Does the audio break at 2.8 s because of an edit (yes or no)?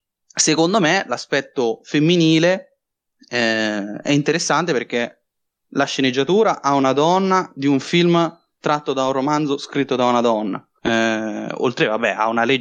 no